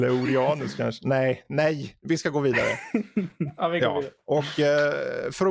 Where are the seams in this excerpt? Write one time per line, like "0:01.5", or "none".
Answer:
none